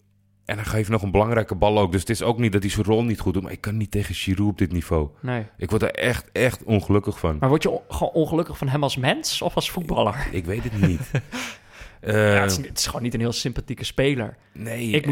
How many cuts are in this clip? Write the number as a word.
one